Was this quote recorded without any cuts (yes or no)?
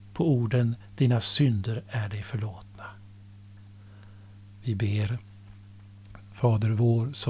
yes